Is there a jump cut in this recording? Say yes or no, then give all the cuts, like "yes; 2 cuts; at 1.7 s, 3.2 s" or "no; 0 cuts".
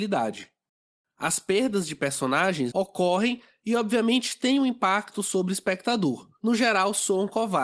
yes; 2 cuts; at 2.7 s, 6.4 s